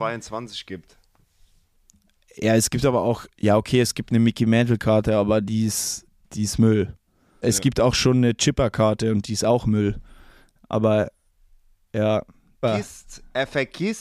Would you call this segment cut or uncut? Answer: cut